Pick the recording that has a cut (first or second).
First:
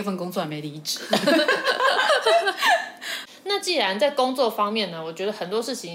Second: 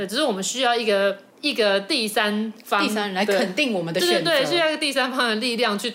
second